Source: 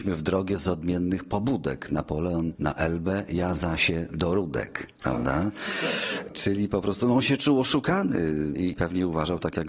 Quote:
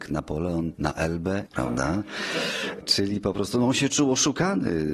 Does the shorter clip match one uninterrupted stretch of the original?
no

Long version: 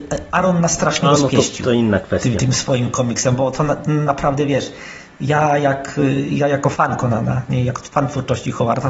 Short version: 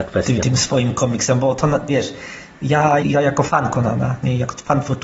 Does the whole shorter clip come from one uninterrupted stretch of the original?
no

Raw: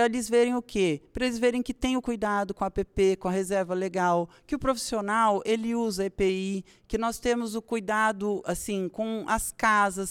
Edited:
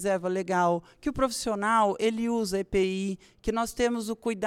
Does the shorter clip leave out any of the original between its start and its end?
no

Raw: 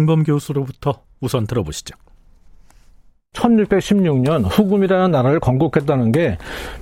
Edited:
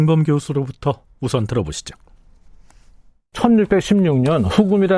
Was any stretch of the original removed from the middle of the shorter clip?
no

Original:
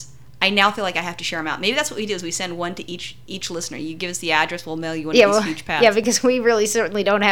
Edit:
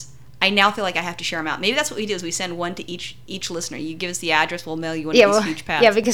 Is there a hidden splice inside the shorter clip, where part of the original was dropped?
no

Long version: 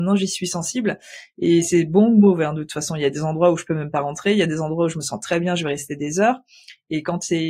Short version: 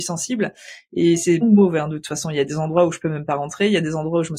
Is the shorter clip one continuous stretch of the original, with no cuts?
no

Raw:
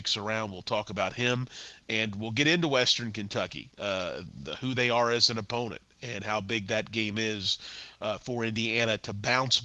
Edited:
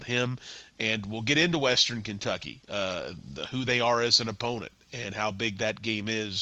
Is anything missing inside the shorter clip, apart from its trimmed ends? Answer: no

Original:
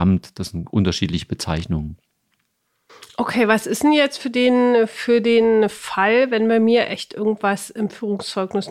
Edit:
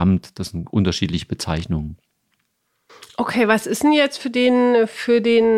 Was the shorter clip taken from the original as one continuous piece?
yes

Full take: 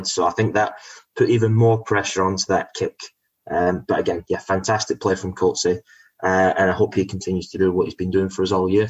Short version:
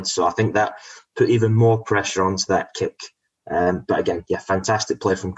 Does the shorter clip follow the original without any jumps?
yes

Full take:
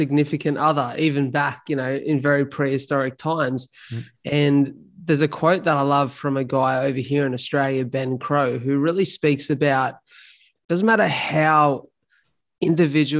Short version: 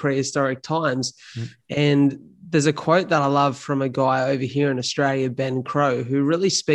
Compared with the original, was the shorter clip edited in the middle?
no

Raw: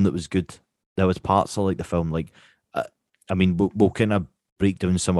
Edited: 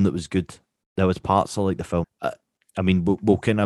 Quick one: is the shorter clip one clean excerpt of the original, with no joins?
no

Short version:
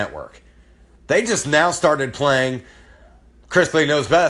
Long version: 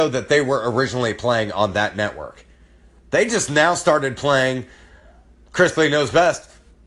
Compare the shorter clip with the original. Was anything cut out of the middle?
no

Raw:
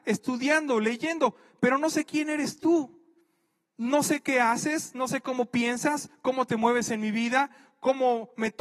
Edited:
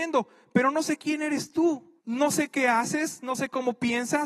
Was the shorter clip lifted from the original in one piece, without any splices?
no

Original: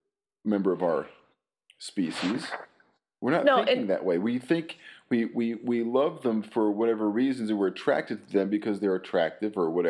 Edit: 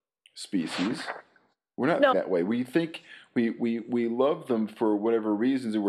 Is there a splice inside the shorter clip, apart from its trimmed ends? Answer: yes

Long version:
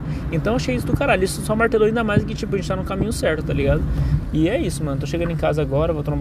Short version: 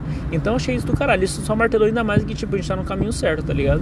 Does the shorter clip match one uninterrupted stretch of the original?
yes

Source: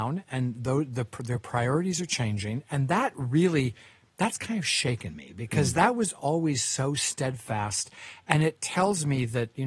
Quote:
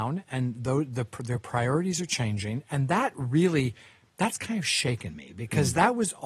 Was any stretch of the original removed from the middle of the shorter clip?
no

